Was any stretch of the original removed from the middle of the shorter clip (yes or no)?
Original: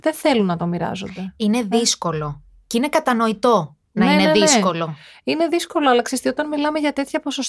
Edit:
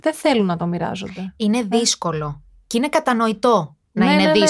no